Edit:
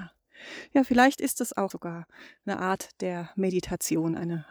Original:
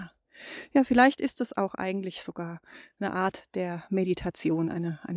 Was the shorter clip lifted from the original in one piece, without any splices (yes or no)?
no